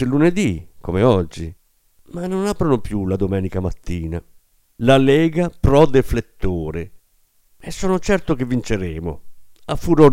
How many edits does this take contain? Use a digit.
1